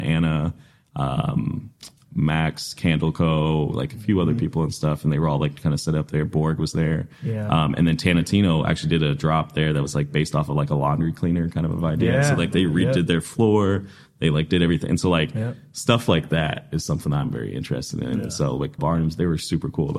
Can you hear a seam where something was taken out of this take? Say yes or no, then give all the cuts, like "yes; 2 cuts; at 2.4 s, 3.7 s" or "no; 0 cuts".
yes; 1 cut; at 18.8 s